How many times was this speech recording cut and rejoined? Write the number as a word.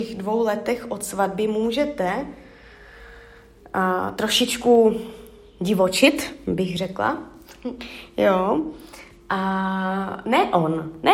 zero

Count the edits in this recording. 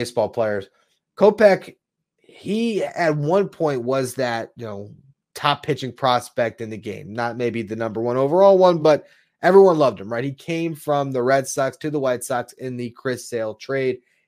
zero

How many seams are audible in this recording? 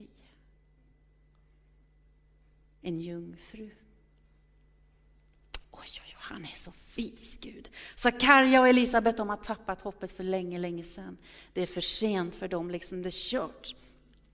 one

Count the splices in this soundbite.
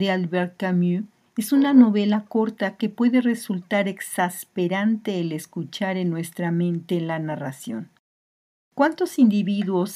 zero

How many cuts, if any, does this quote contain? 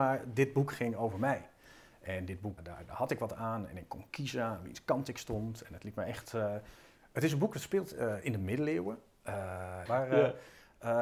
two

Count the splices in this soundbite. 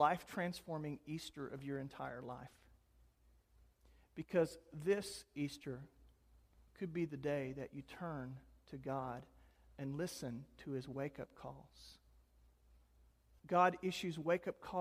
one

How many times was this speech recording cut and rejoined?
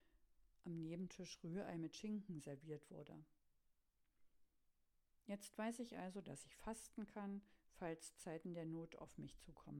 zero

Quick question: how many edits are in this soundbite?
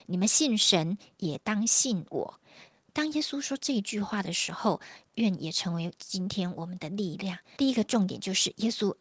one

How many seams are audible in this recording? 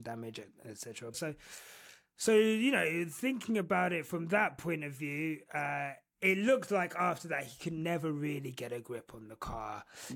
one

